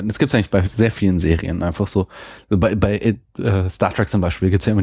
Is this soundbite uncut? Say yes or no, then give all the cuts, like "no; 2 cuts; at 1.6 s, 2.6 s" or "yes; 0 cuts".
yes; 0 cuts